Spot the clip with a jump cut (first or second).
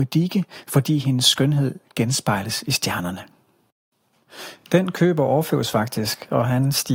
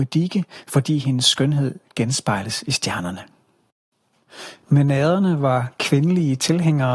second